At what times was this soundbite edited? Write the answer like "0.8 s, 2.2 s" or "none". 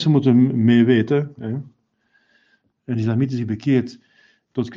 2.7 s

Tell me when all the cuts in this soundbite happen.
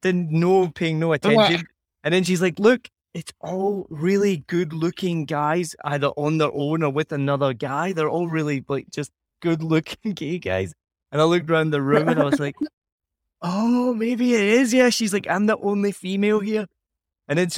none

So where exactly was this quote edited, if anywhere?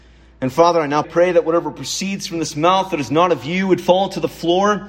1.0 s

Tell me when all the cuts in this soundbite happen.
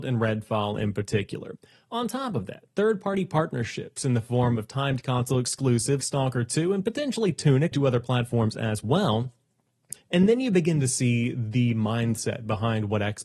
6.0 s, 7.7 s, 10.0 s

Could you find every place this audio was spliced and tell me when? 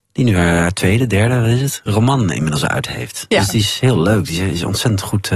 none

